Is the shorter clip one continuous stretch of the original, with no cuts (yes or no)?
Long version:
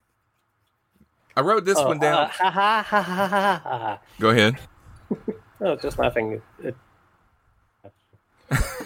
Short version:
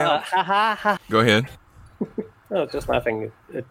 no